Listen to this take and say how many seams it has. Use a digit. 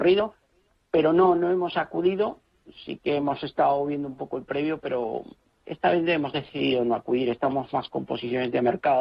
0